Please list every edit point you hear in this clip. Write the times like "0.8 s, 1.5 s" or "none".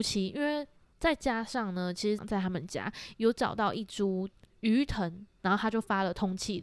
0.9 s, 2.2 s, 5.4 s